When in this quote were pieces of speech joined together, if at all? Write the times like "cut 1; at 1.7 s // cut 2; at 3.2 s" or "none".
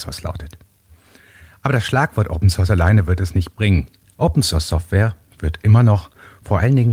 cut 1; at 4.0 s

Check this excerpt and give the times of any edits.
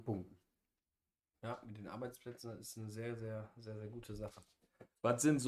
cut 1; at 1.3 s

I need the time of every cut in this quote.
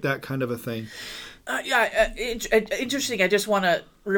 cut 1; at 1.4 s

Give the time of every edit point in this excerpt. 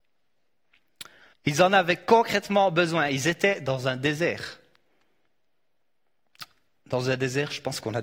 cut 1; at 1.3 s

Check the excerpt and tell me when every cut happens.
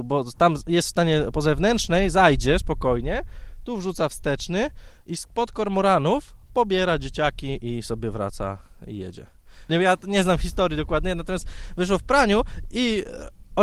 cut 1; at 1.3 s // cut 2; at 9.7 s

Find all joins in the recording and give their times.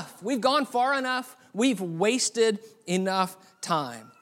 none

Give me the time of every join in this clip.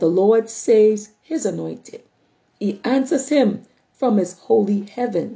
none

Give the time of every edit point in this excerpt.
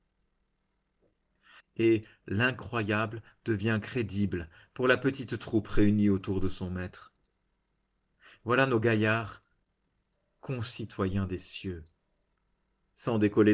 cut 1; at 1.6 s

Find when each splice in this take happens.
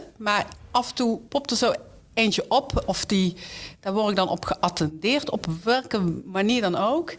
none

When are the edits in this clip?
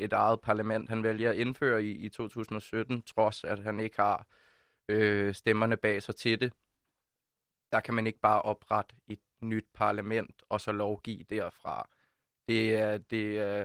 none

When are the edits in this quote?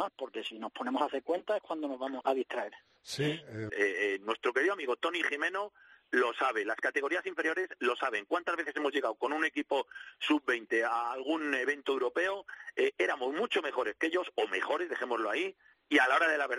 cut 1; at 2.2 s // cut 2; at 3.7 s

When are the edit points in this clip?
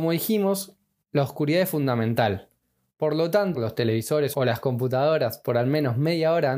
cut 1; at 3.5 s

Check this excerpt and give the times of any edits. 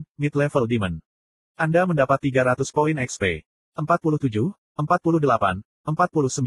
cut 1; at 3.6 s

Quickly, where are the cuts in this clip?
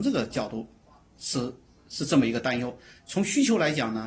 none

